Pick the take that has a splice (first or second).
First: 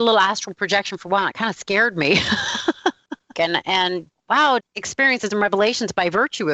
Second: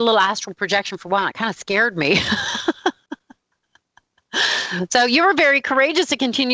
first